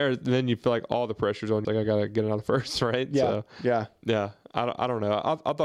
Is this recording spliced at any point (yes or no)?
yes